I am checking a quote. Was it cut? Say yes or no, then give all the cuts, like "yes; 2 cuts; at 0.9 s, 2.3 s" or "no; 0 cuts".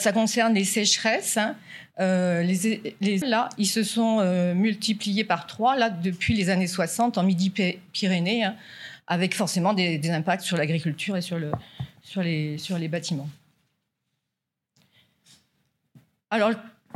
yes; 1 cut; at 3.2 s